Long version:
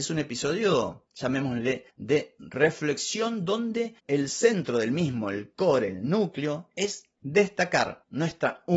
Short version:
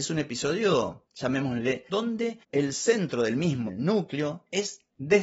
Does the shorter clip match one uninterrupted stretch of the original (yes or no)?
no